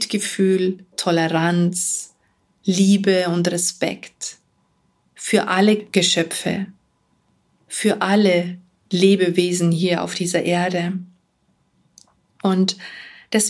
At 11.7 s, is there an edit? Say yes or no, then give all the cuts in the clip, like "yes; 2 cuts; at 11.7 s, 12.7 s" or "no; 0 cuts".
no; 1 cut; at 0.9 s